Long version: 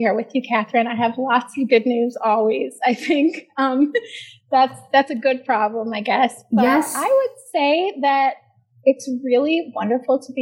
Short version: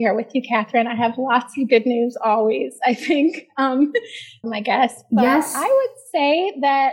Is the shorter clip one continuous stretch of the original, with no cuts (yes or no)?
no